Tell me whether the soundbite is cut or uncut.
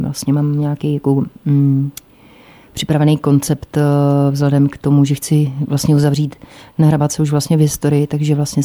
uncut